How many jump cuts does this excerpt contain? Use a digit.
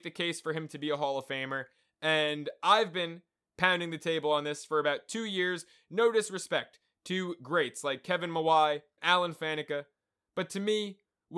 1